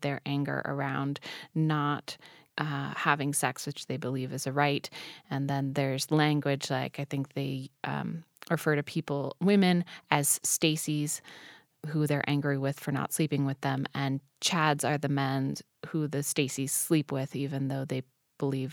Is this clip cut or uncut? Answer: uncut